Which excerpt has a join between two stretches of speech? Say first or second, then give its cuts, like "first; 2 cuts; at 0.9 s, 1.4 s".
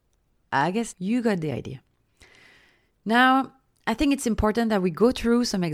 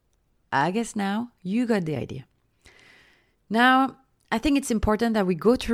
first; 1 cut; at 0.9 s